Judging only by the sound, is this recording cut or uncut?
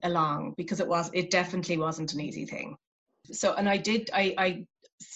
cut